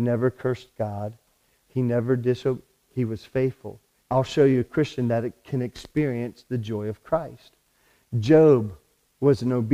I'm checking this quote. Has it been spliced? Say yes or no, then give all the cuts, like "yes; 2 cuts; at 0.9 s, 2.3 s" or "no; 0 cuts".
yes; 1 cut; at 4.0 s